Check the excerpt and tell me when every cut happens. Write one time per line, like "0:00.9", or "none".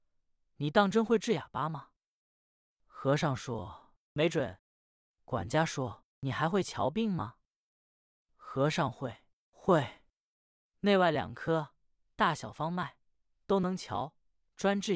0:04.6